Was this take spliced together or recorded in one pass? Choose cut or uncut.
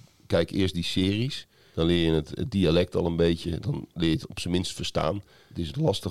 uncut